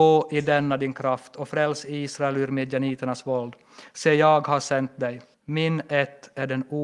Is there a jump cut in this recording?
yes; 1 cut; at 5.3 s

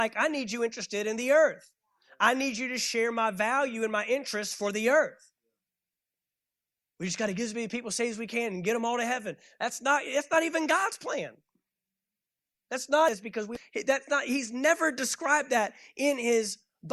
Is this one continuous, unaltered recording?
yes; 0 cuts

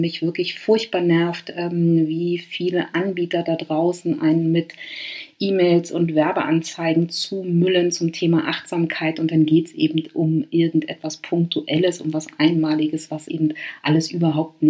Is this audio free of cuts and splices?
yes; 0 cuts

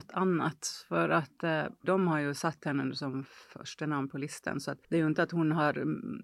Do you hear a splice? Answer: yes; 1 cut; at 1.8 s

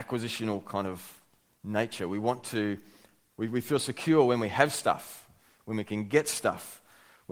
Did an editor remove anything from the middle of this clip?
no; 0 cuts

